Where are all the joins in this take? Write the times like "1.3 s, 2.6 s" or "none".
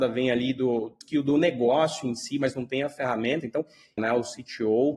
1.0 s, 4.0 s